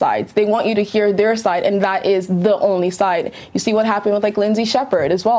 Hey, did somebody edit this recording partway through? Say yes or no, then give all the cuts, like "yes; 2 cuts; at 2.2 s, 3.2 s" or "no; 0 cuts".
no; 0 cuts